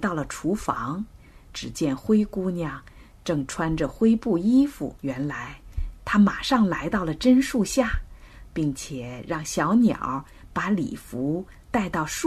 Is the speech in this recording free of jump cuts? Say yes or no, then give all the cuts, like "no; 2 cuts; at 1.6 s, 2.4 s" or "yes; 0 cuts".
no; 3 cuts; at 5.0 s, 6.0 s, 8.5 s